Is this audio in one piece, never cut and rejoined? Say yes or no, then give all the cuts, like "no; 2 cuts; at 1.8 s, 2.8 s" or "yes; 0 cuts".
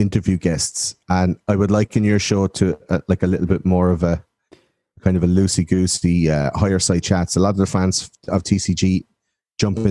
yes; 0 cuts